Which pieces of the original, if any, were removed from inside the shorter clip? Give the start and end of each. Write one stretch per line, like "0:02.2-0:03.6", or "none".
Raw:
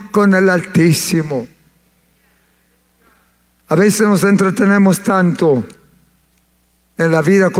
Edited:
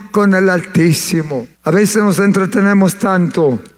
0:01.5-0:03.6